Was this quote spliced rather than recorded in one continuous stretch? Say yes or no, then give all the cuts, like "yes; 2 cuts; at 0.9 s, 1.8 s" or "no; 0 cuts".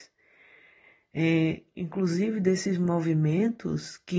yes; 1 cut; at 1.8 s